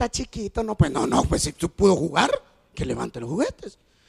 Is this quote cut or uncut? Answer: uncut